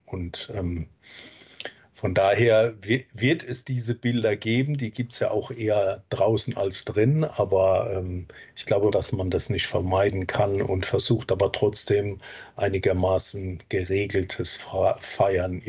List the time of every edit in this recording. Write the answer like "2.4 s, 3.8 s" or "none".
8.9 s